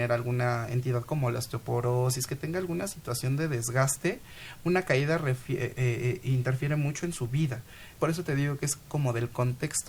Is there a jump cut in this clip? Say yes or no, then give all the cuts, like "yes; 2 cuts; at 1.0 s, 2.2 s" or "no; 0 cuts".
yes; 1 cut; at 8.0 s